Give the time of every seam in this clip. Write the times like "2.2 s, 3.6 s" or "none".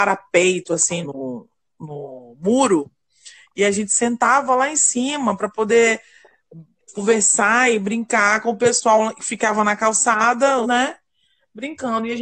1.0 s, 10.6 s